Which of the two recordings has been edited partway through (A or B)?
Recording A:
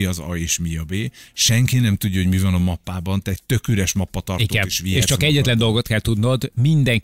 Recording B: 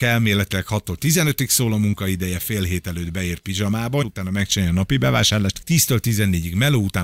B